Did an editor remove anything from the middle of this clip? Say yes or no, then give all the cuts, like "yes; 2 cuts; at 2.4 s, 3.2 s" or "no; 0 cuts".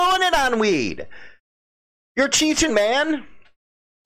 yes; 1 cut; at 2.7 s